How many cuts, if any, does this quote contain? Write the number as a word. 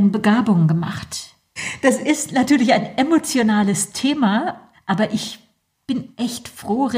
two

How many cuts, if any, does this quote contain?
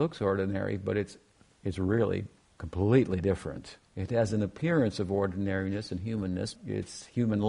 two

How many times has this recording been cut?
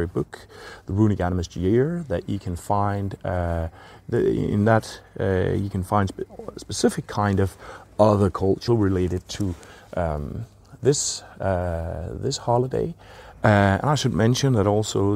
two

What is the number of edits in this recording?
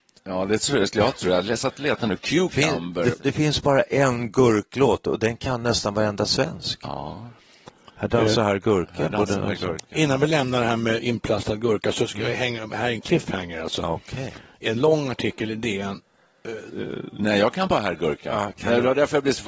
two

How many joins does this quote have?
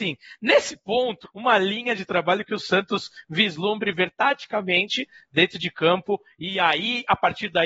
one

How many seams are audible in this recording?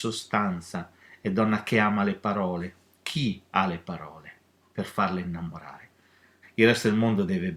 one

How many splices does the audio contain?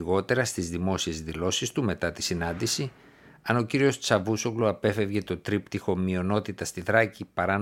zero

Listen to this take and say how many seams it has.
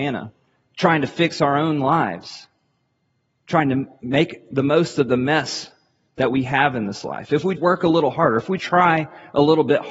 two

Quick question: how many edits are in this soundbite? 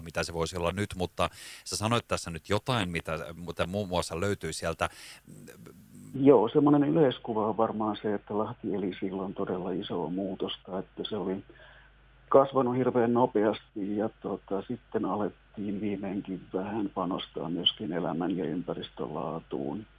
one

